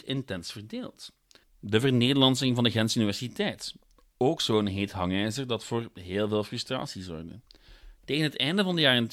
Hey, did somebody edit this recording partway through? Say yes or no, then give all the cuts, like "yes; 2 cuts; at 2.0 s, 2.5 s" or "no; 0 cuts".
yes; 1 cut; at 1.4 s